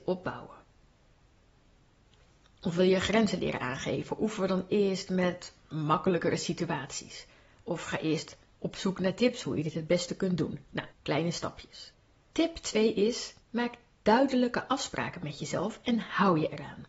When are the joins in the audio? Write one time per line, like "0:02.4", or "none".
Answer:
0:10.9
0:13.4